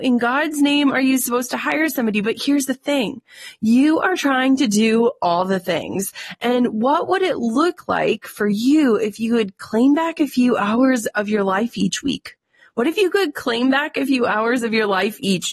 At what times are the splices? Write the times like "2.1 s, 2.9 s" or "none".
none